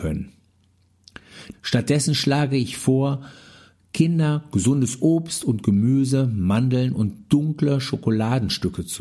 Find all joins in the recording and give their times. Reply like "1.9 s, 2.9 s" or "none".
1.5 s